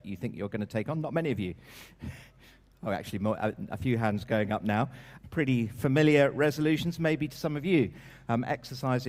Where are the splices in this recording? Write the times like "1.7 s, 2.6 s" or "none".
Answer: 5.2 s